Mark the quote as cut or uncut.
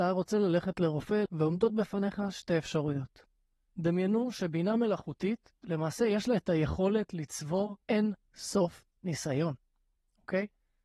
cut